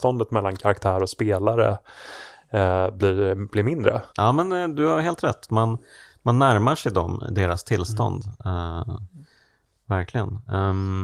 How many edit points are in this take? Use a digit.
1